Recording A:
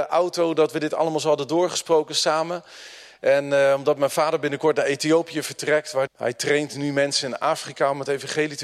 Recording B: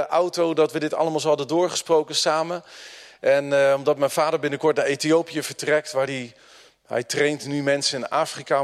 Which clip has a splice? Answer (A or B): A